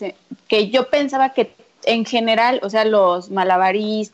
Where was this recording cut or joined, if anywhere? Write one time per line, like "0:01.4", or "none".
none